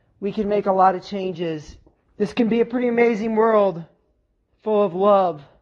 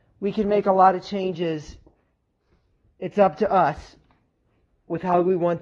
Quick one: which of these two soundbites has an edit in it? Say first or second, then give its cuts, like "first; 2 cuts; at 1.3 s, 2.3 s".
first; 1 cut; at 2.1 s